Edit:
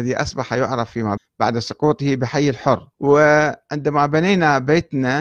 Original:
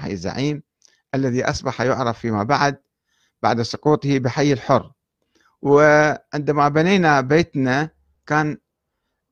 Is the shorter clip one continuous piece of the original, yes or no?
no